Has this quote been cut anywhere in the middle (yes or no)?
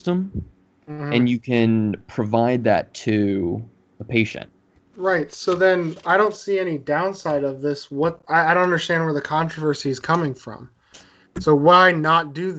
yes